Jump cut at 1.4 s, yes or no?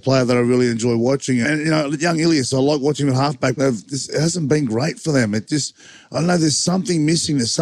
yes